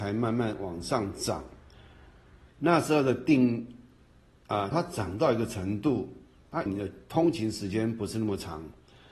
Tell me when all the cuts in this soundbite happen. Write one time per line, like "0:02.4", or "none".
0:02.5
0:04.7
0:06.7